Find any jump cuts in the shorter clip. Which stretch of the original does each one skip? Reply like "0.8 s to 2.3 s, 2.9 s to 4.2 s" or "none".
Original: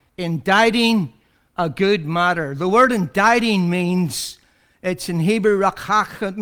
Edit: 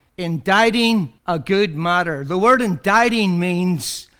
1.2 s to 1.5 s